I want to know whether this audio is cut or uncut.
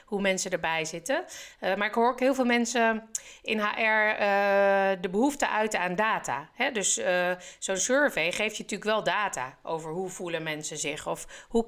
uncut